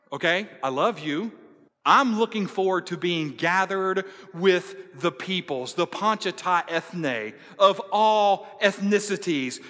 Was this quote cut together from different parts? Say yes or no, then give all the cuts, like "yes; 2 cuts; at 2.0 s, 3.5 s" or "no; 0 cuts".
yes; 1 cut; at 1.7 s